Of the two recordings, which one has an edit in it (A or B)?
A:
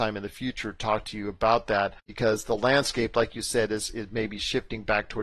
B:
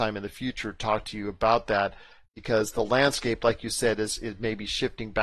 A